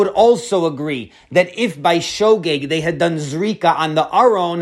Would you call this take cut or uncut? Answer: uncut